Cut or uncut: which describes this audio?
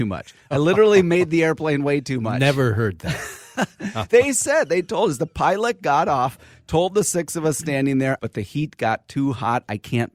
cut